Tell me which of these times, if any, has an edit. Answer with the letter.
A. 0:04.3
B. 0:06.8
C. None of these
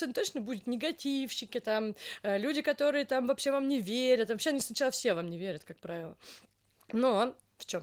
C